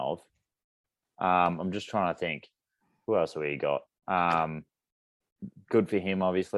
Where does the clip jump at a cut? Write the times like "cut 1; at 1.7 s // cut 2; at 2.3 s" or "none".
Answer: cut 1; at 3.9 s